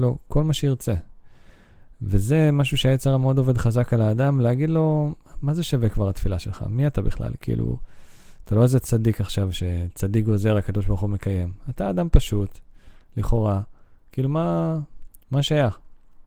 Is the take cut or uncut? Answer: uncut